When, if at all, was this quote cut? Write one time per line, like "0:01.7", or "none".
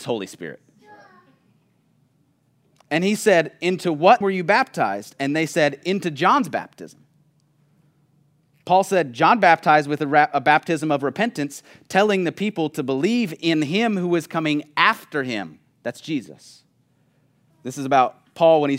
0:04.2
0:17.5